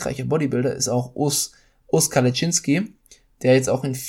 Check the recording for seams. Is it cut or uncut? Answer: uncut